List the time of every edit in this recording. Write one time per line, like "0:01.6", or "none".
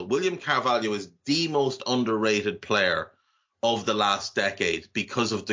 none